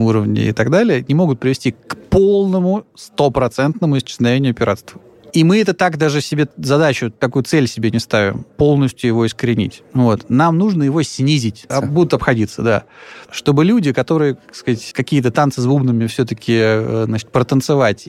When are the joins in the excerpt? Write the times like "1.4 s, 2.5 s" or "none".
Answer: 11.7 s, 13.3 s, 14.9 s